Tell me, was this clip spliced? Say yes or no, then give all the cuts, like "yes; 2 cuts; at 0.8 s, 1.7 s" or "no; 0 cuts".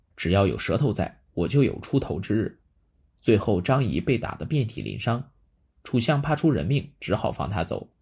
yes; 1 cut; at 3.1 s